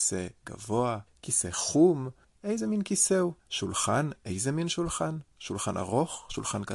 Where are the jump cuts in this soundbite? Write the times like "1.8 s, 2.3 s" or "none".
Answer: 1.1 s, 2.2 s, 3.4 s